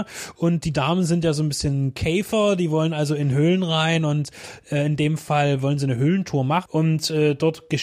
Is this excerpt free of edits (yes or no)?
no